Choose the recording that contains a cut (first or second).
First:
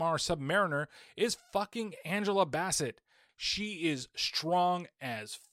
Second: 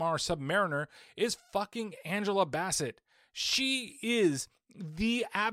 first